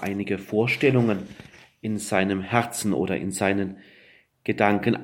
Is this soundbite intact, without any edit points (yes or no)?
yes